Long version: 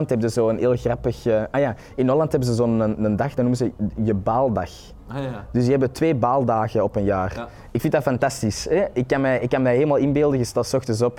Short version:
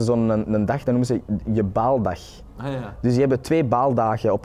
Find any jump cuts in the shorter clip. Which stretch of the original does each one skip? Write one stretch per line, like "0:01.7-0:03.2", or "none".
none